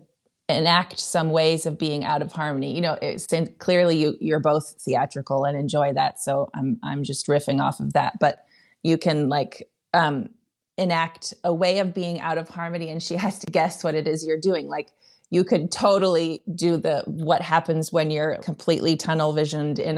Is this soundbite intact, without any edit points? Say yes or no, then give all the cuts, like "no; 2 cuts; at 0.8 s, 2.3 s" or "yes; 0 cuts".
yes; 0 cuts